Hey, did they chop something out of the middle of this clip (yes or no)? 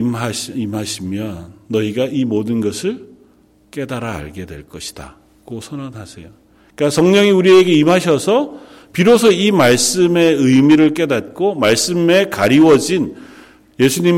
no